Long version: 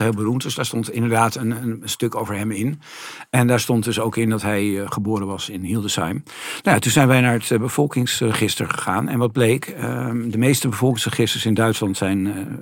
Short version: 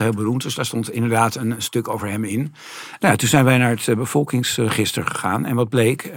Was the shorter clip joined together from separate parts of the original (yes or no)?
yes